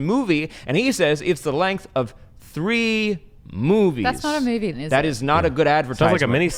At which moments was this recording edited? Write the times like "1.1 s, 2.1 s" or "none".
4.7 s

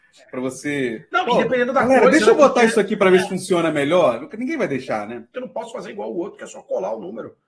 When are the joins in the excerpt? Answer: 5.3 s

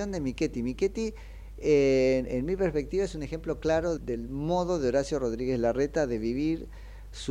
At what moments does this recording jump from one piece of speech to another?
4.0 s

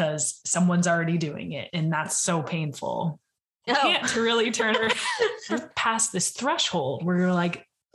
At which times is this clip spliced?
3.7 s, 5.5 s

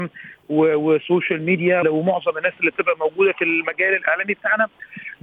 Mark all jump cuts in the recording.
1.8 s, 3.3 s

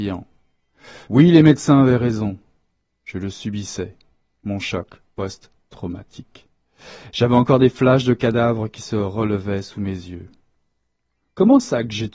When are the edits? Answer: 1.0 s

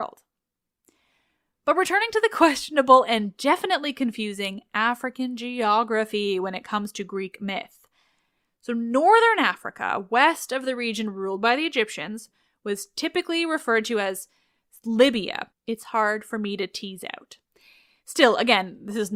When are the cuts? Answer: 15.5 s

